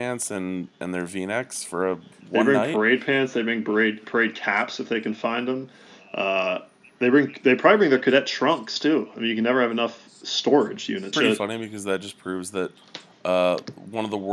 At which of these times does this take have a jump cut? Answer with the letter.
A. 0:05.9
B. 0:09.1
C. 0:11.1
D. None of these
C